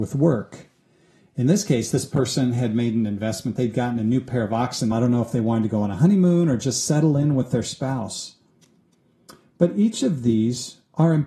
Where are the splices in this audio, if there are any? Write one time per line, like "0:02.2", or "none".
0:04.9